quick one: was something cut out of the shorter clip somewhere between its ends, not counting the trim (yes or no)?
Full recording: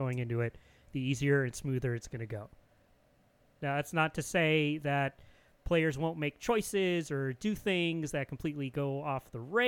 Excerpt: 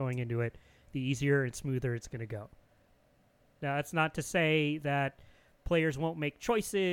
no